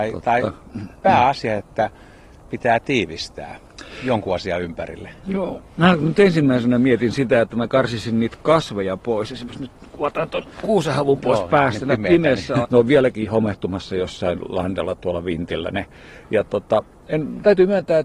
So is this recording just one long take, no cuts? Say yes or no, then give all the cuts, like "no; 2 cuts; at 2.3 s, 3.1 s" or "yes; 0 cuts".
no; 1 cut; at 12.6 s